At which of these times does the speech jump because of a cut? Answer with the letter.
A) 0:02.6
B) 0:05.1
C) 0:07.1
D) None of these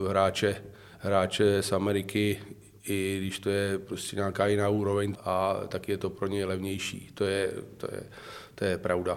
B